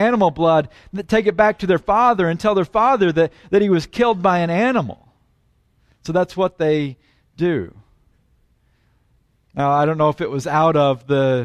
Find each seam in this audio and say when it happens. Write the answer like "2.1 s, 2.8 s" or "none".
none